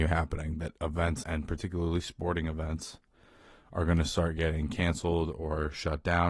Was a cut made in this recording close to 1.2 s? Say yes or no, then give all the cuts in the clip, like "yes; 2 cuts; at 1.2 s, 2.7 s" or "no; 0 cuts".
yes; 1 cut; at 1.2 s